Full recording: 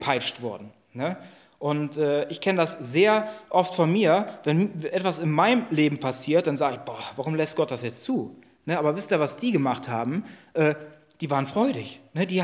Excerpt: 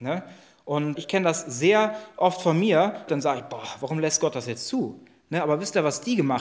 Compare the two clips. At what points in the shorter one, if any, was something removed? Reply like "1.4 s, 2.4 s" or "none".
1.0 s, 3.1 s